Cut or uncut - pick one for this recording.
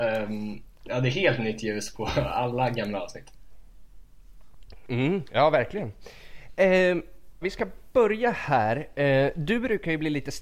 cut